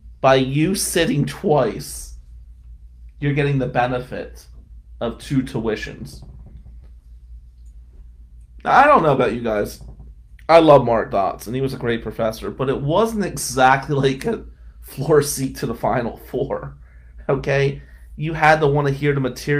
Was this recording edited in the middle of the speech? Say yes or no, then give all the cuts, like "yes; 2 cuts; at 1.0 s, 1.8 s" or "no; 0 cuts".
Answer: no; 0 cuts